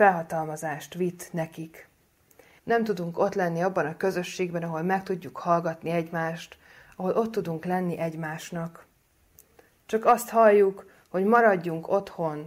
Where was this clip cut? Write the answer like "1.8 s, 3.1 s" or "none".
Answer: 2.6 s